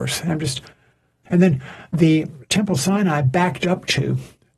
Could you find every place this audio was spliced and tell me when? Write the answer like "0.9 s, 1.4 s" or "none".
1.3 s